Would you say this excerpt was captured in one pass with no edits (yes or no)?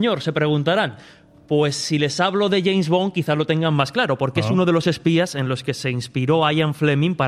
yes